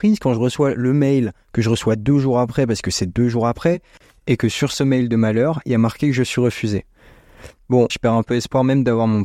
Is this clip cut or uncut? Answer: cut